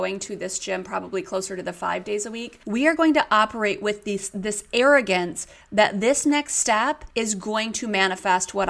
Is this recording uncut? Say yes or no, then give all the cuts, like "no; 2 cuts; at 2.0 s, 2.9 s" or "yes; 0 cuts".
no; 1 cut; at 2.6 s